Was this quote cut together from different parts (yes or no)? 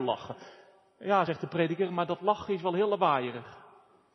no